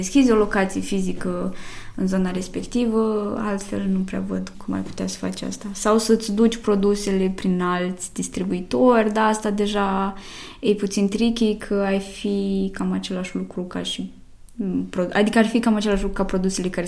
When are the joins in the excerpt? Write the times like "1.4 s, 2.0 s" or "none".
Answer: 4.5 s

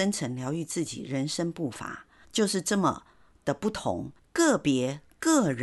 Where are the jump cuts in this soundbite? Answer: 2.2 s, 4.2 s

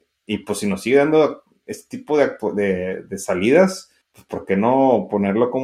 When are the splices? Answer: 4.0 s

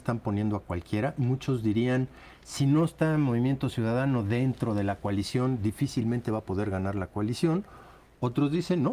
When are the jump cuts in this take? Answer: none

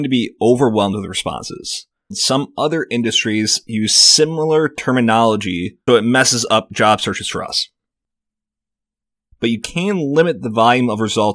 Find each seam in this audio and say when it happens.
2.1 s, 5.9 s, 9.3 s

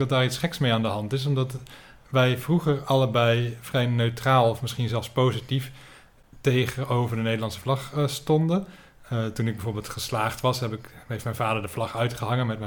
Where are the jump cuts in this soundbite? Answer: none

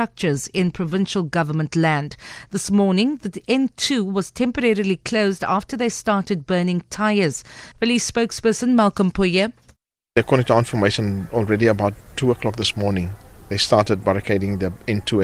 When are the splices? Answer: 7.7 s

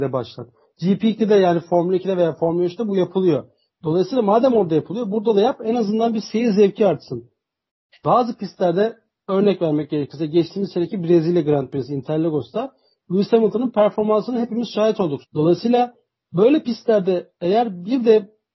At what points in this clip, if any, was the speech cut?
15.2 s

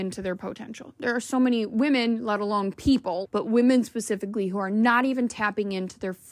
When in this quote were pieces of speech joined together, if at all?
3.2 s

